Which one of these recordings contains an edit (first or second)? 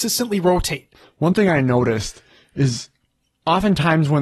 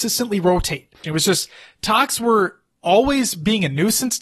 second